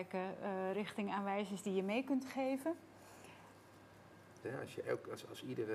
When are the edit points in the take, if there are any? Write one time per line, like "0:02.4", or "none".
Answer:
0:04.4